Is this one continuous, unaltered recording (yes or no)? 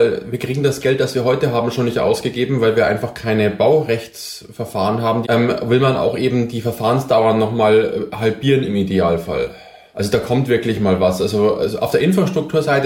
no